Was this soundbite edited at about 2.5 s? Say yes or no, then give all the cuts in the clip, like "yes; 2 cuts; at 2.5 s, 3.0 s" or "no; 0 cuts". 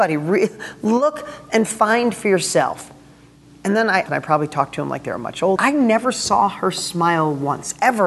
no; 2 cuts; at 4.1 s, 5.6 s